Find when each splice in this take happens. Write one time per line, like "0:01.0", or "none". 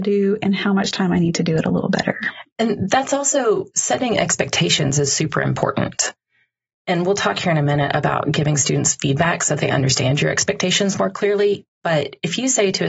none